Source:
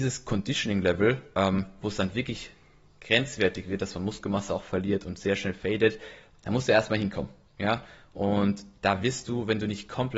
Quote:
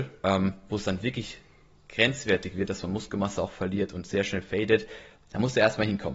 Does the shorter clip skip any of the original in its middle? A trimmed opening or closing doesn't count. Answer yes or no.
no